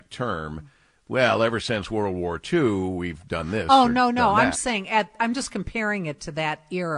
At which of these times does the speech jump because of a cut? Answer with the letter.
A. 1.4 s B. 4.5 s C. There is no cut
B